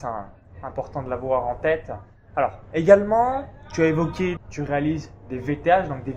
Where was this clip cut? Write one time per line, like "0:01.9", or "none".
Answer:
0:04.4